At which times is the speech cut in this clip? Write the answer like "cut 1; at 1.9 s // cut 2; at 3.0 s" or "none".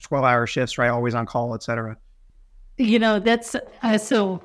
none

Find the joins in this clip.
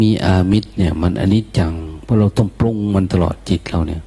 none

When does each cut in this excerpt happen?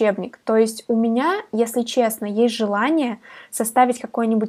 none

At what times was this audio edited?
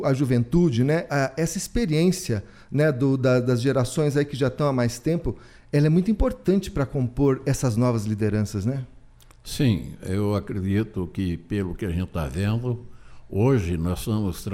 none

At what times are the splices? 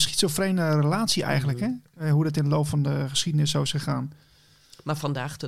none

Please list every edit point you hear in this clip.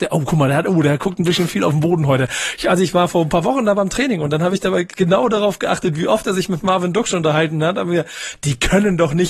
none

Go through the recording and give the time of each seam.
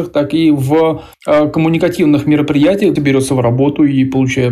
cut 1; at 1.1 s // cut 2; at 3.0 s

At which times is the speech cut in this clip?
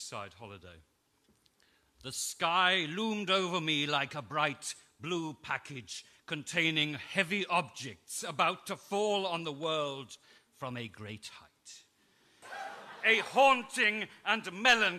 cut 1; at 12.4 s

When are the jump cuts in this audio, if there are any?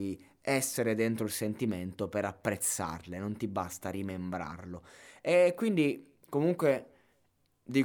none

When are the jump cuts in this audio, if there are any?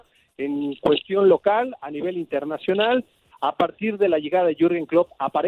cut 1; at 3.3 s

